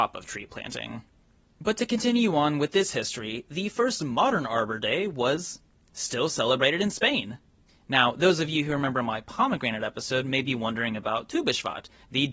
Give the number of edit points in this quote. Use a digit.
1